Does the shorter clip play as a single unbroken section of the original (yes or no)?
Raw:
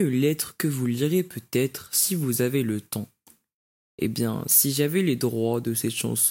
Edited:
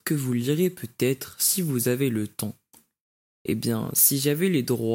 yes